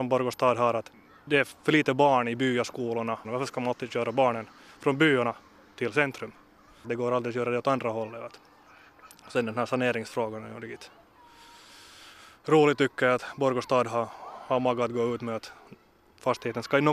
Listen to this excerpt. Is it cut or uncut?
cut